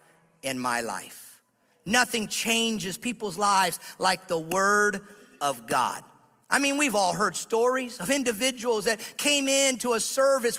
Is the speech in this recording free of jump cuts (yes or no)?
yes